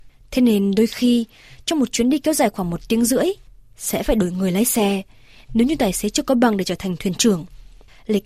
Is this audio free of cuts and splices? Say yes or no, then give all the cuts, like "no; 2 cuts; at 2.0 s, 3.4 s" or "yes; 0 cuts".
yes; 0 cuts